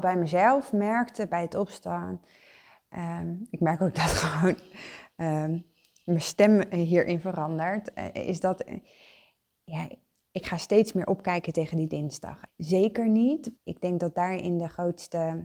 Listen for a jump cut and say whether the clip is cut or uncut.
cut